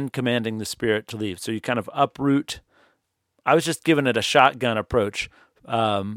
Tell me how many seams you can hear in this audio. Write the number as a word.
zero